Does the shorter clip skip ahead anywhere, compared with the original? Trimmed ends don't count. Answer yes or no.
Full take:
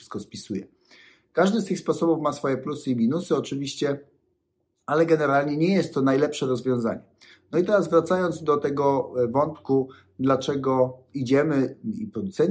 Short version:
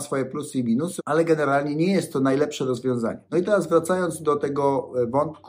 yes